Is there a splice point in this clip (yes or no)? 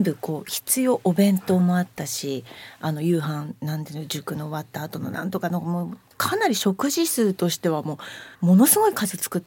yes